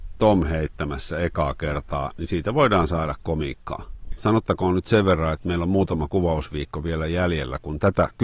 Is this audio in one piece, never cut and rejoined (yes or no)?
no